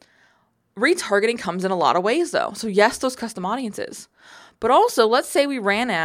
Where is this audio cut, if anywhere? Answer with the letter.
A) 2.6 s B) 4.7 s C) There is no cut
C